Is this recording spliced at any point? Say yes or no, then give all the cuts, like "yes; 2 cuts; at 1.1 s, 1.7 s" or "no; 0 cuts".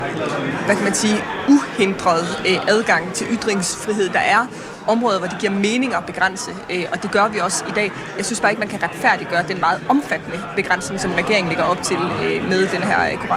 no; 0 cuts